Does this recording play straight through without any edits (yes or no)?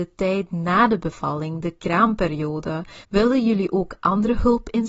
no